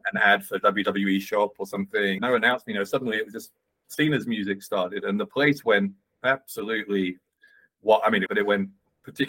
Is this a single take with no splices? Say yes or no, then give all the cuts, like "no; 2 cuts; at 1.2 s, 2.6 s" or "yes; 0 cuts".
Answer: no; 2 cuts; at 2.2 s, 8.3 s